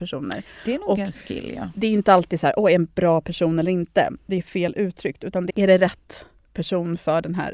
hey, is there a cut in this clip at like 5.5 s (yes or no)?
yes